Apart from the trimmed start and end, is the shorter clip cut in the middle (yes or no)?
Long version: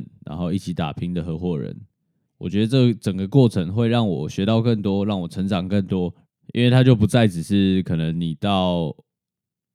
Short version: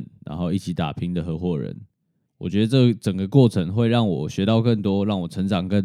no